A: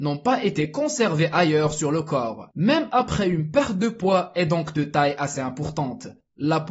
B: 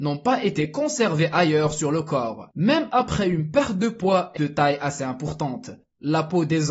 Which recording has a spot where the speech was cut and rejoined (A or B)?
B